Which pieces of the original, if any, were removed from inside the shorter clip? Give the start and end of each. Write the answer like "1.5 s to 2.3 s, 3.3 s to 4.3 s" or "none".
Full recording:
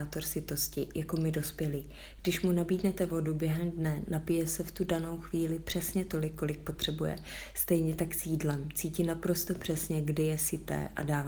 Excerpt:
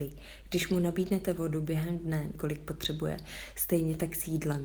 4.1 s to 6.3 s